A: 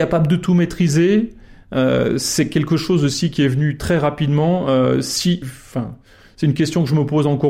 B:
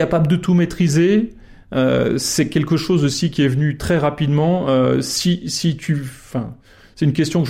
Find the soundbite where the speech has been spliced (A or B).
A